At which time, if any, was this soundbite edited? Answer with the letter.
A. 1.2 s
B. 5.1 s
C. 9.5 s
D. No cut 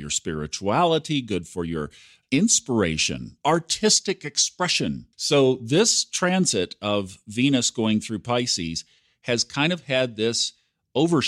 B